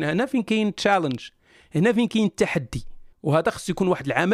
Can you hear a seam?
yes; 1 cut; at 3.1 s

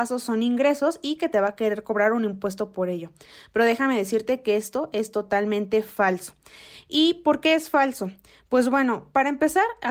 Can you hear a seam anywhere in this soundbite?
no; 0 cuts

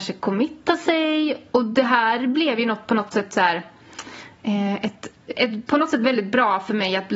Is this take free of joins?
no; 1 cut; at 5.4 s

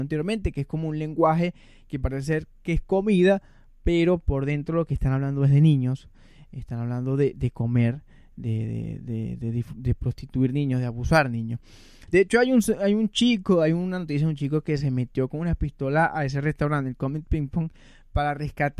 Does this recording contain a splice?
no; 0 cuts

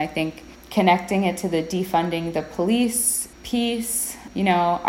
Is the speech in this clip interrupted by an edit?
yes; 1 cut; at 3.3 s

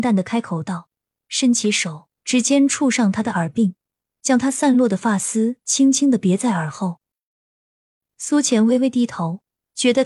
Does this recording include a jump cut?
no; 0 cuts

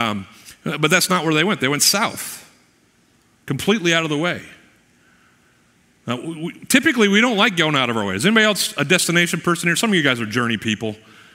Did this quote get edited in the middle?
no; 0 cuts

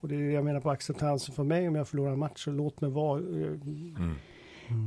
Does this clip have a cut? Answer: yes; 1 cut; at 3.9 s

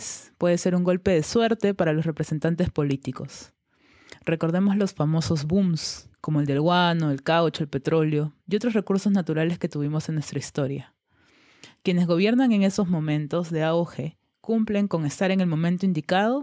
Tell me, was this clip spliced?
yes; 1 cut; at 6.1 s

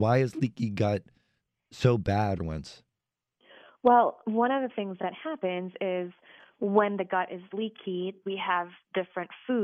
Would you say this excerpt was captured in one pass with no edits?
no; 2 cuts; at 2.4 s, 8.2 s

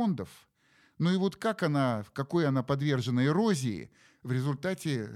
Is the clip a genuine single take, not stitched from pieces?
yes; 0 cuts

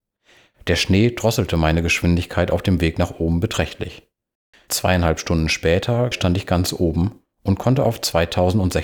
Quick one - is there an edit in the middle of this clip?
yes; 2 cuts; at 4.5 s, 6.1 s

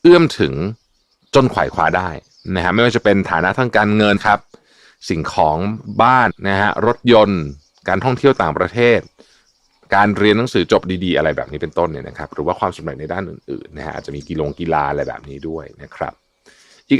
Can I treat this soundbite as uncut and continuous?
no; 2 cuts; at 4.2 s, 6.3 s

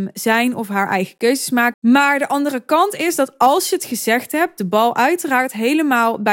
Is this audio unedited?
no; 1 cut; at 1.7 s

